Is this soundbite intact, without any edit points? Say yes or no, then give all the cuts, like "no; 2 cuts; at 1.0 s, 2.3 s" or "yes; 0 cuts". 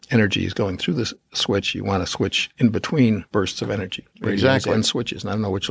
no; 1 cut; at 4.1 s